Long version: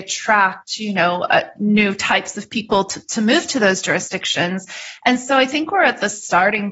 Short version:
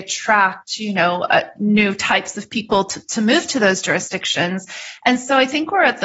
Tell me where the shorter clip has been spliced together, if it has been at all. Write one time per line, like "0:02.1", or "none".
none